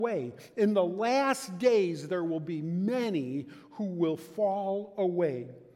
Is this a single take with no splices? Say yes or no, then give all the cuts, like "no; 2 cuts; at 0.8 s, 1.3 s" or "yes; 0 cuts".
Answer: yes; 0 cuts